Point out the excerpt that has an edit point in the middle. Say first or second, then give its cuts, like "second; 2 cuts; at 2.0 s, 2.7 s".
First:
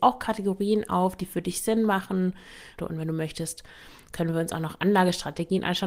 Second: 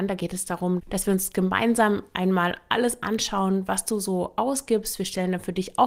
first; 1 cut; at 2.8 s